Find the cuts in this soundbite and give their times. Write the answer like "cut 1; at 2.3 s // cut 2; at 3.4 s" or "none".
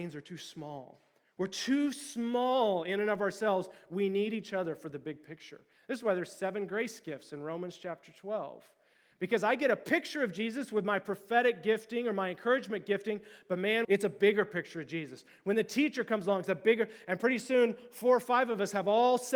cut 1; at 13.8 s